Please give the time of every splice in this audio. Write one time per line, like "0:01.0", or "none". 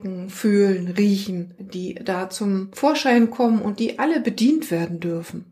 0:01.6